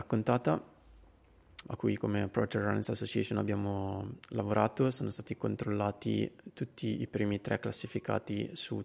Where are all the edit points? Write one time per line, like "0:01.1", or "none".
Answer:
0:01.6